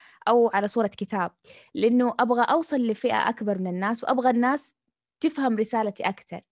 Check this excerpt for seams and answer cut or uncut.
uncut